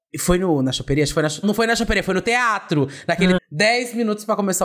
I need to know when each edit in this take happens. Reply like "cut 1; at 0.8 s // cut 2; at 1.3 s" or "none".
cut 1; at 1.4 s // cut 2; at 3.4 s